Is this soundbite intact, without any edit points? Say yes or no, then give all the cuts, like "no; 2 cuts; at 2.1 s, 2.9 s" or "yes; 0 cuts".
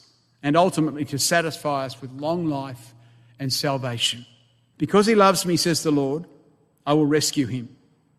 no; 1 cut; at 4.7 s